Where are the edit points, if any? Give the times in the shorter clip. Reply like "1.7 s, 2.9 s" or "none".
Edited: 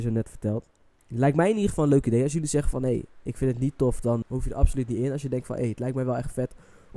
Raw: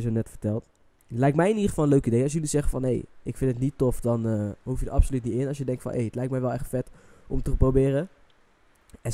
4.2 s